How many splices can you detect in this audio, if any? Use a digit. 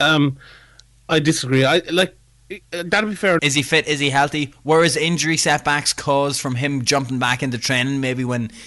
1